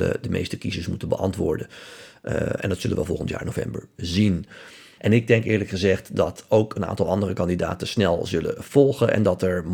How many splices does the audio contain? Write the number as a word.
one